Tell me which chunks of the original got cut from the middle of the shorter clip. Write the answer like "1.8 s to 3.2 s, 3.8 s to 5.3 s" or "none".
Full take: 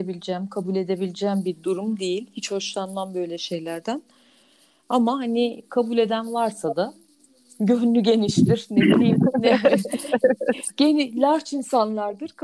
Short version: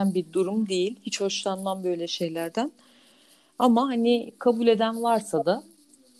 none